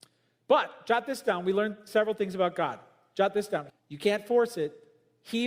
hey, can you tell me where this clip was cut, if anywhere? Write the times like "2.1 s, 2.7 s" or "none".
3.7 s